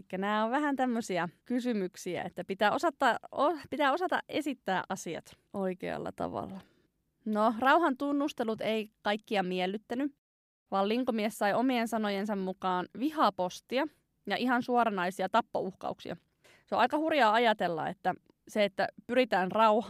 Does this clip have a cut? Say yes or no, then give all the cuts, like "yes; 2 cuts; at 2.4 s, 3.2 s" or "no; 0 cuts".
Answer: no; 0 cuts